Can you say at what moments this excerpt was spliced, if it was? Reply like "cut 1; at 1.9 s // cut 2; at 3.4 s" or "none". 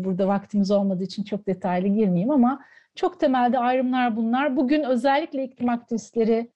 none